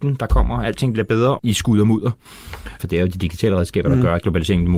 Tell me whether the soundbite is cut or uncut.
cut